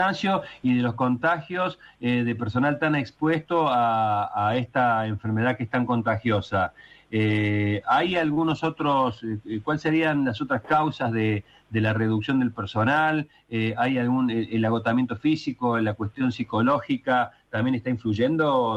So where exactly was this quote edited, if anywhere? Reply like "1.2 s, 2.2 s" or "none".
none